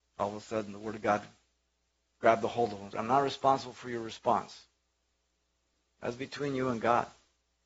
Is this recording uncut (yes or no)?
no